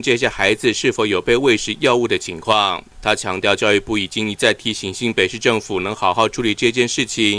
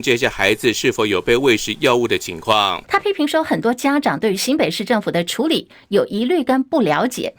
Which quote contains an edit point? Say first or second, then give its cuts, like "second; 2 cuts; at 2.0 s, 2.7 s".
second; 1 cut; at 2.8 s